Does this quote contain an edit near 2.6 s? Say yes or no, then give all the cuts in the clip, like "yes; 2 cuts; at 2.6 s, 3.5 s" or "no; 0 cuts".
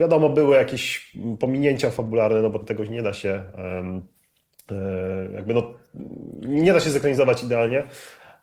yes; 1 cut; at 2.6 s